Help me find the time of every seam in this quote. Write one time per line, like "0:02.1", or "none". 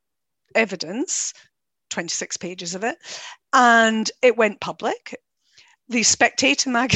none